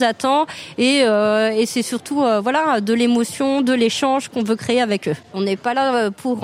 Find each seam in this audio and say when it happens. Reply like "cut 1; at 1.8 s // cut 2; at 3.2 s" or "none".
cut 1; at 5.3 s